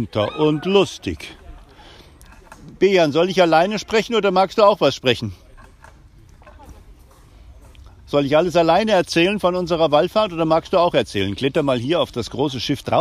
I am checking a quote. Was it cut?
no; 0 cuts

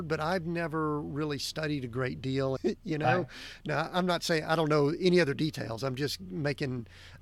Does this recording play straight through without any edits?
no; 1 cut; at 2.6 s

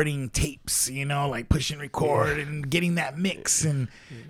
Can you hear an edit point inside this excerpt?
no; 0 cuts

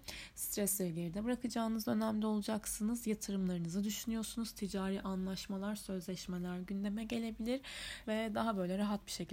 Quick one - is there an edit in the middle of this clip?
yes; 1 cut; at 8.0 s

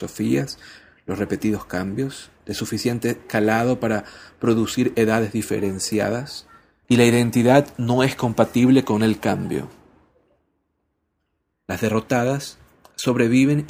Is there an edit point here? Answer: yes; 2 cuts; at 6.8 s, 11.5 s

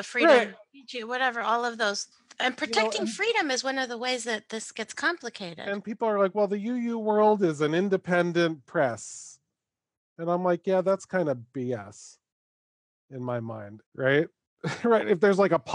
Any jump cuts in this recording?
yes; 1 cut; at 13.9 s

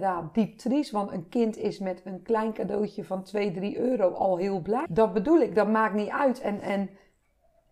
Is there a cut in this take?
yes; 1 cut; at 4.9 s

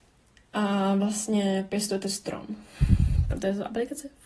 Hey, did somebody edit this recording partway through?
no; 0 cuts

